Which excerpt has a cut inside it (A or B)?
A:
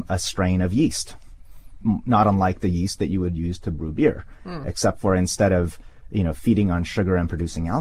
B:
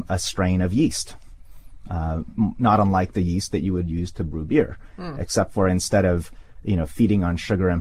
A